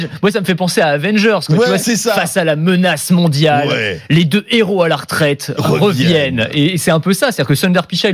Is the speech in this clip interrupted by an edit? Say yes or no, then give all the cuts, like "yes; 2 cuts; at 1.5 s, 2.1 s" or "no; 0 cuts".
yes; 1 cut; at 1.8 s